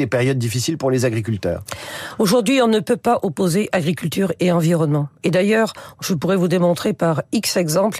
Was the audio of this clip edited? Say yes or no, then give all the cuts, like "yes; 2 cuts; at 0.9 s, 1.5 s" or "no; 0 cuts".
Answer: no; 0 cuts